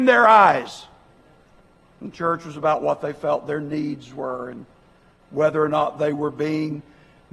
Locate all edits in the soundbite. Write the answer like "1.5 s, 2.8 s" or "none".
1.8 s